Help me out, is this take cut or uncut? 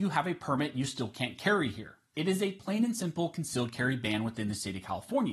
cut